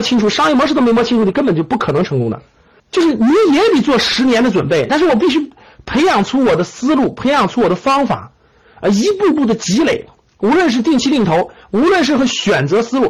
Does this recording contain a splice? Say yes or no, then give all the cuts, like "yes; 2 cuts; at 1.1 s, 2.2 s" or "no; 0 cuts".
yes; 2 cuts; at 2.8 s, 4.9 s